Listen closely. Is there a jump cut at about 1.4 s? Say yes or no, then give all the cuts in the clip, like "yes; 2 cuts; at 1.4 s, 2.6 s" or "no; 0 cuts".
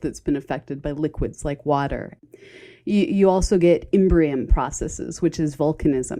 no; 0 cuts